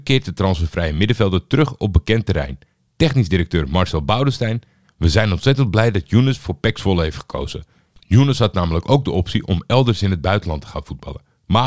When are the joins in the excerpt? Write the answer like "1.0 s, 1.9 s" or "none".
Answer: none